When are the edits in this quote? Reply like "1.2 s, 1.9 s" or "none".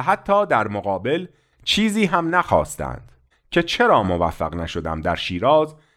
3.3 s